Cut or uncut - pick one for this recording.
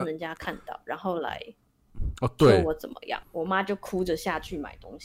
cut